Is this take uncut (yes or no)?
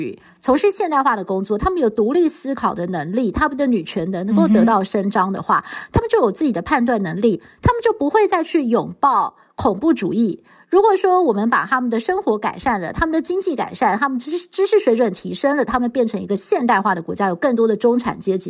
yes